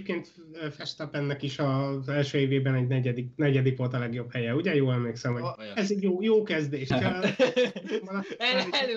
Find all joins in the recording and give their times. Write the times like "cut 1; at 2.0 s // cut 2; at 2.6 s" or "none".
cut 1; at 5.6 s // cut 2; at 6.9 s